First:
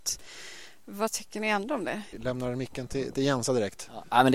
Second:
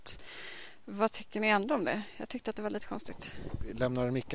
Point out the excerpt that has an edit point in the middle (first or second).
first